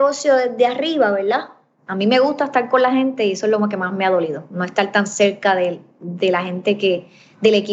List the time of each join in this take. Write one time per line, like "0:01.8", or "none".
0:01.8